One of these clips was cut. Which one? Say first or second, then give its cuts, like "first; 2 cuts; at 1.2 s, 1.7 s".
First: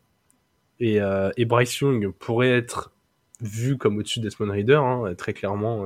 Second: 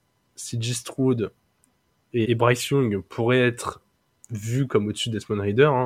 second; 1 cut; at 2.2 s